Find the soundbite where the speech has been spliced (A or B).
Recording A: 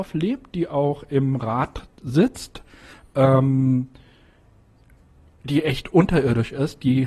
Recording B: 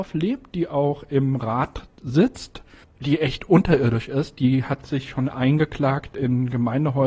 B